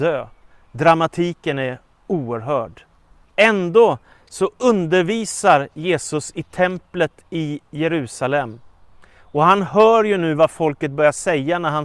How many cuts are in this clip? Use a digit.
1